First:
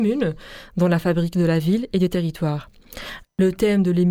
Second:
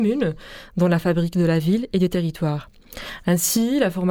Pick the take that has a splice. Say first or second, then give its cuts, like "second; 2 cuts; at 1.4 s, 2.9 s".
first; 1 cut; at 3.2 s